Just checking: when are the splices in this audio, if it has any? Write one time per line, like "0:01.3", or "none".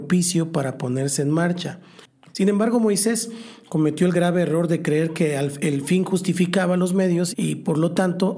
0:02.3
0:07.3